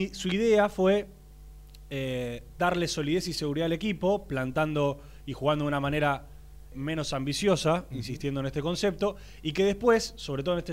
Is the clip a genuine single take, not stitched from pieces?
no; 1 cut; at 6.7 s

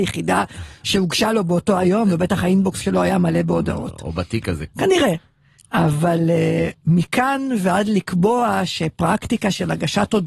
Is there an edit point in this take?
yes; 1 cut; at 4.7 s

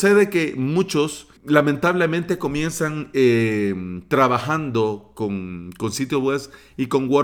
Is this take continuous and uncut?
no; 1 cut; at 1.4 s

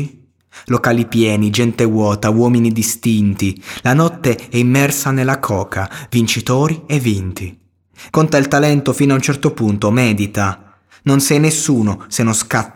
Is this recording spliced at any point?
yes; 1 cut; at 8.1 s

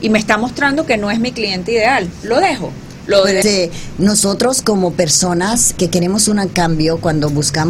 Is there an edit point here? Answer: yes; 2 cuts; at 3.4 s, 5.8 s

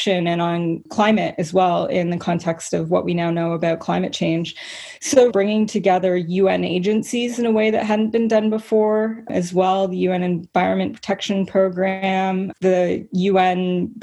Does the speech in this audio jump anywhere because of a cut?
yes; 2 cuts; at 5.3 s, 12.6 s

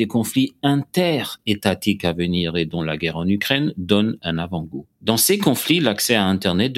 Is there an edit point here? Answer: no; 0 cuts

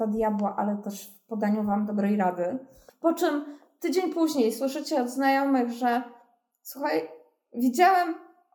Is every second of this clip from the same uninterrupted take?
no; 1 cut; at 2.9 s

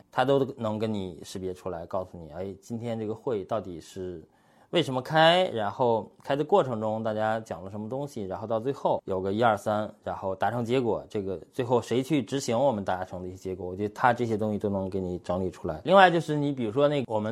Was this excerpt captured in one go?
yes; 0 cuts

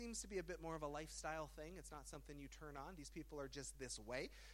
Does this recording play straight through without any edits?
yes; 0 cuts

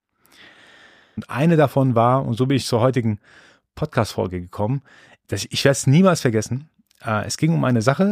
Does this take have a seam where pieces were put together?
yes; 1 cut; at 1.2 s

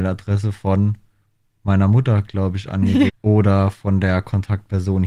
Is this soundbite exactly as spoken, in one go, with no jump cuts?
no; 1 cut; at 3.1 s

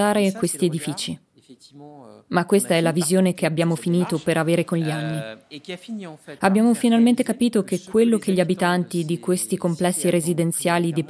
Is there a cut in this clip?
no; 0 cuts

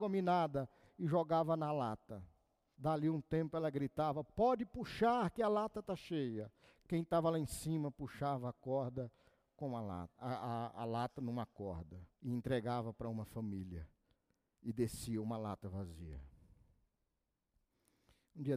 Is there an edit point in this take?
yes; 2 cuts; at 2.7 s, 12.1 s

